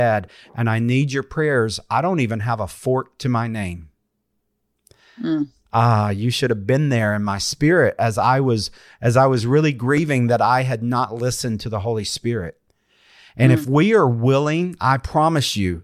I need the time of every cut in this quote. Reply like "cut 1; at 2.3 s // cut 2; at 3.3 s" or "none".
none